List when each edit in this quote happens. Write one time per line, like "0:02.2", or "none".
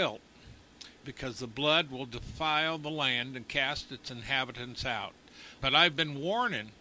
0:01.0
0:05.6